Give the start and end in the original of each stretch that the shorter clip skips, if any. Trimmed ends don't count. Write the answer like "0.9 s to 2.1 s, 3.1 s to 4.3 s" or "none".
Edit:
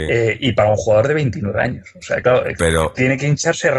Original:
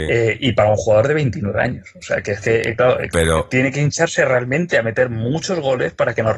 2.2 s to 2.8 s